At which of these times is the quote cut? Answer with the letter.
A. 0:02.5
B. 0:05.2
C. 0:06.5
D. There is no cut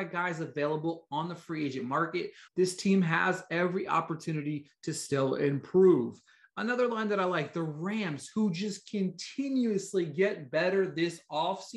A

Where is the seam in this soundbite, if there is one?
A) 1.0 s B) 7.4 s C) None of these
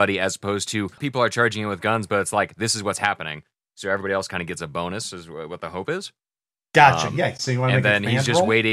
A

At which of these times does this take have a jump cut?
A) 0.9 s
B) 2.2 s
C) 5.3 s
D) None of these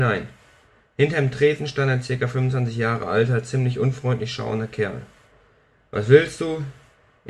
D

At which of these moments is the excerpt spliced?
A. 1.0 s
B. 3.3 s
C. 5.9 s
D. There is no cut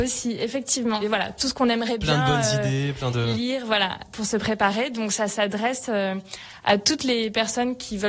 A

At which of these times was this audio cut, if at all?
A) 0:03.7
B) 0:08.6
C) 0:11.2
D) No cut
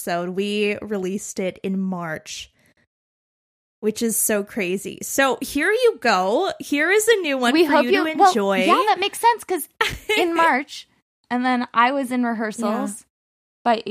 C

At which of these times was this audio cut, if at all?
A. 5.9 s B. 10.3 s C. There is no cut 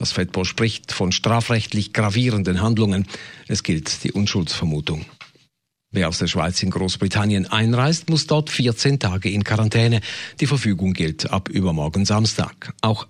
A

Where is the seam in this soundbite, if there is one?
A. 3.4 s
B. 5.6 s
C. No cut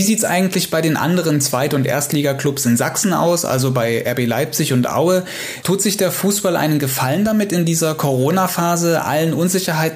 B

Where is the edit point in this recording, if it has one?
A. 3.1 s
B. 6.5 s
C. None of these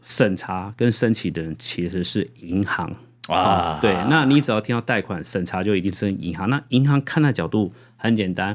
C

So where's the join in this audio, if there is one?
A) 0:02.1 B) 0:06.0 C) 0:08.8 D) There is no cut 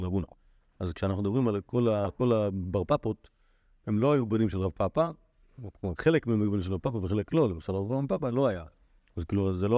D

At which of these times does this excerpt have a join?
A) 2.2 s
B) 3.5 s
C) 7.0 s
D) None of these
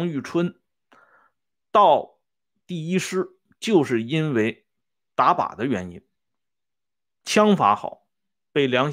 D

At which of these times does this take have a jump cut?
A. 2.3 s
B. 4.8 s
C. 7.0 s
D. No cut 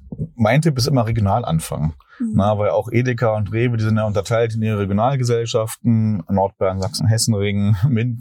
C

